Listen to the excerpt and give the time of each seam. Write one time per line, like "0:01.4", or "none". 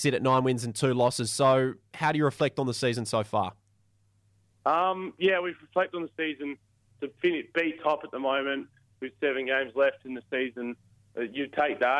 0:06.9